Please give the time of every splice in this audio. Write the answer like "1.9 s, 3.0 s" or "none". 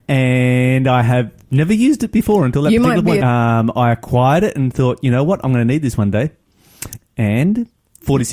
3.2 s